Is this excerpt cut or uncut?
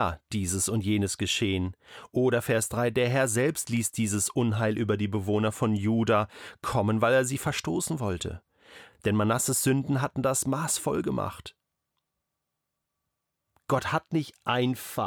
uncut